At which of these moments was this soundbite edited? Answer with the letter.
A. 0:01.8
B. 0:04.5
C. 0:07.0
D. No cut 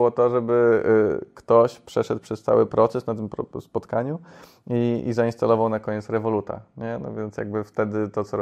D